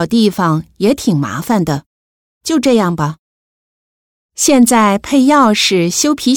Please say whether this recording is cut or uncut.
cut